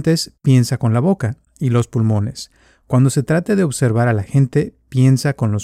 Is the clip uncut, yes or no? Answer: yes